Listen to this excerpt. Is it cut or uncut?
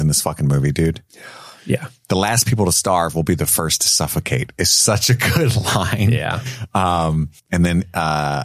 cut